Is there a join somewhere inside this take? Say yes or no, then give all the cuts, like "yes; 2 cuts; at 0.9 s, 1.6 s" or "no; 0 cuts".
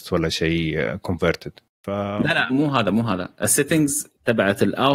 yes; 1 cut; at 2.5 s